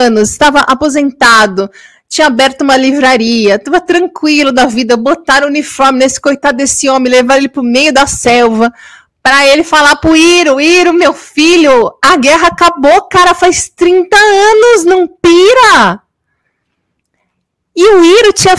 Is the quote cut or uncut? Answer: uncut